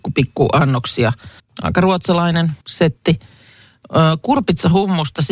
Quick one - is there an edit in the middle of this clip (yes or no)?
yes